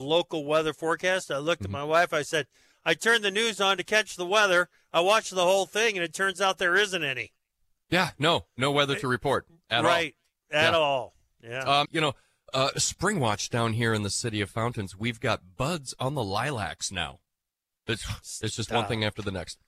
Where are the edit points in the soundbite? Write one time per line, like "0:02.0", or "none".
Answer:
0:11.8